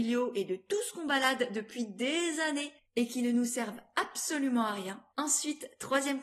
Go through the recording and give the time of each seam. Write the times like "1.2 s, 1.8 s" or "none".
5.1 s